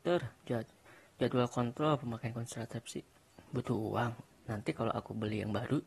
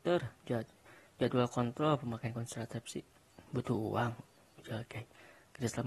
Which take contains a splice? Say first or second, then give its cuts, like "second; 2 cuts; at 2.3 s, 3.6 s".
first; 1 cut; at 4.3 s